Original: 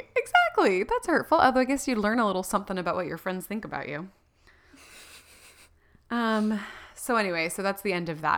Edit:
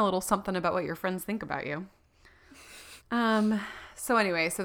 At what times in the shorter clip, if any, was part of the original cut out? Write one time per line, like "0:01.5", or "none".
0:03.0